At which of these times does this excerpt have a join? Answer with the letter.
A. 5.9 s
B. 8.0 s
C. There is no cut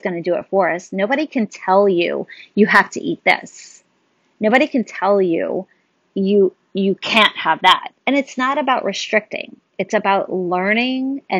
B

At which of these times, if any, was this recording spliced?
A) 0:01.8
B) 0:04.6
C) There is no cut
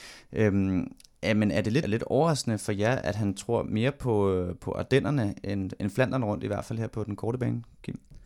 A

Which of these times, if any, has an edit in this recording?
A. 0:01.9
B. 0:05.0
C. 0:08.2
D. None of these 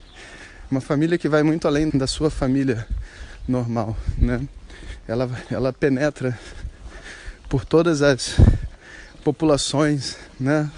A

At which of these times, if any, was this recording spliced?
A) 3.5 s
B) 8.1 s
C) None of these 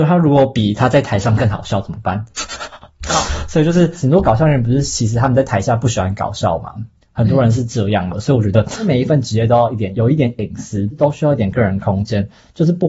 B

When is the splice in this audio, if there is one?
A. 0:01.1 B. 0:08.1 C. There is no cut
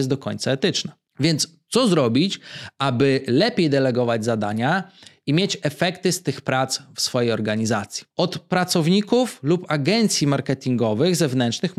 B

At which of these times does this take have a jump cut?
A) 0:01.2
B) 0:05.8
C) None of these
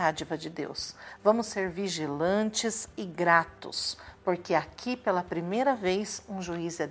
A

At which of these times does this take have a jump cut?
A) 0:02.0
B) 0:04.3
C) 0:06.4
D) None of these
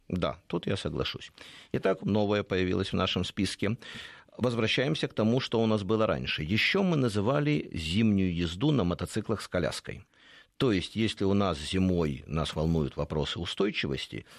A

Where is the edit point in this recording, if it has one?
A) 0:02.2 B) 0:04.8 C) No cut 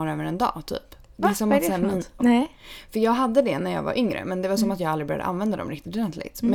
A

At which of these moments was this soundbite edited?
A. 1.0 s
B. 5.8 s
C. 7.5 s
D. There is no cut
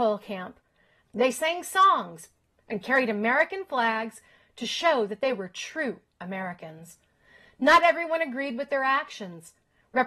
A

